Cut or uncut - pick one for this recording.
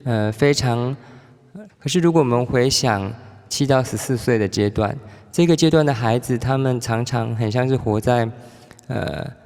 cut